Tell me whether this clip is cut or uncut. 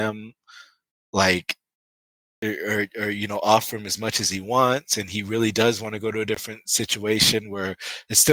uncut